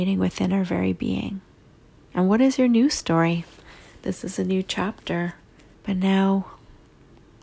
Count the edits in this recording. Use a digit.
2